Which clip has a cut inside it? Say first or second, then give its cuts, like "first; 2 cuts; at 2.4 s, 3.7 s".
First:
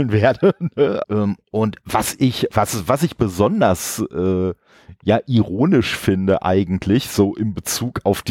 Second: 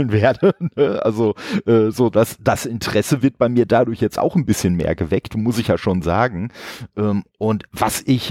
first; 1 cut; at 1.0 s